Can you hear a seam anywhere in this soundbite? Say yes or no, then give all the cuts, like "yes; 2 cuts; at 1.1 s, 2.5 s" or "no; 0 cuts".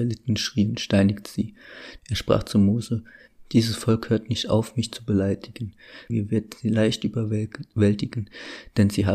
yes; 2 cuts; at 2.0 s, 6.1 s